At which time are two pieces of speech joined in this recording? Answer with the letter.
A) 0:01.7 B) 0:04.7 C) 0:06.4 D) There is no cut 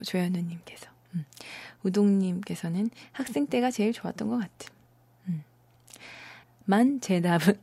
C